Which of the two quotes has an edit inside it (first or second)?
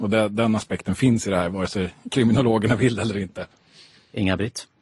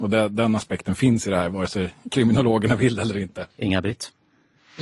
second